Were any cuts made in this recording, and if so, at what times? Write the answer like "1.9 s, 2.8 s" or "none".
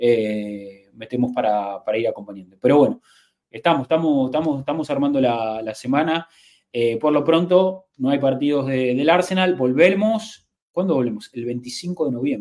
none